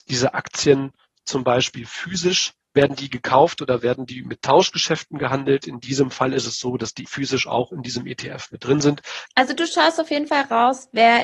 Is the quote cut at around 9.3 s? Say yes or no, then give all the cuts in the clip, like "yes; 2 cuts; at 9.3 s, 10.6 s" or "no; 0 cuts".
yes; 2 cuts; at 7.1 s, 9.3 s